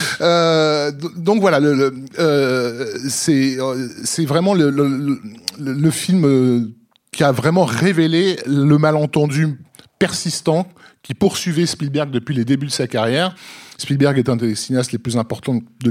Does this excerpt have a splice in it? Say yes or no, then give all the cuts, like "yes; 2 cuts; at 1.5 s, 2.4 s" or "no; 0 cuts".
no; 0 cuts